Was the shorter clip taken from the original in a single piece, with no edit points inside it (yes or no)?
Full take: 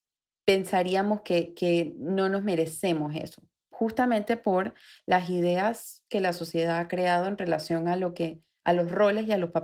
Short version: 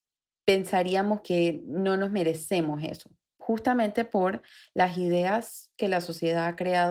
no